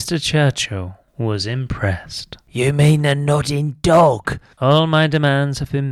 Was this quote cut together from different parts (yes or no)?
yes